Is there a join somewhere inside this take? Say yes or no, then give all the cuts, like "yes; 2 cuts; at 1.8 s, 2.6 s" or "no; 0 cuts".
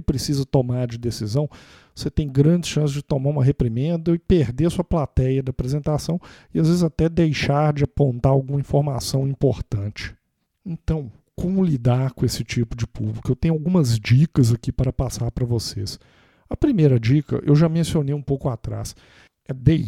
no; 0 cuts